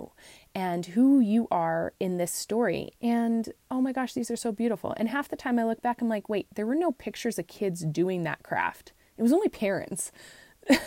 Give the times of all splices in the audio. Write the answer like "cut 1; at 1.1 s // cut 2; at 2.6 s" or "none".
cut 1; at 2.9 s